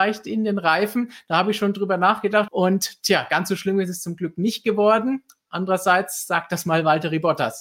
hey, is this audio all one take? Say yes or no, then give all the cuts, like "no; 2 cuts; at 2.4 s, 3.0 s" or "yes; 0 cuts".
no; 1 cut; at 2.5 s